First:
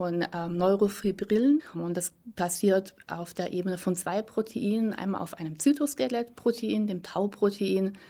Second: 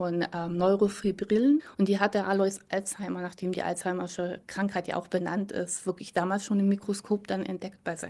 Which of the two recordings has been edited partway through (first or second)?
first